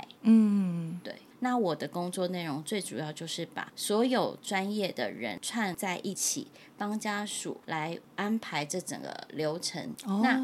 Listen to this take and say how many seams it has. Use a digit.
1